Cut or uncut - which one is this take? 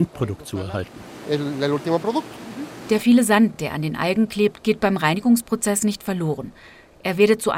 uncut